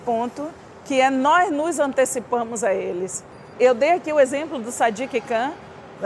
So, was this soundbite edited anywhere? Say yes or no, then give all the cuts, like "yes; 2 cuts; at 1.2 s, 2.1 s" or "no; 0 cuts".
yes; 1 cut; at 3.5 s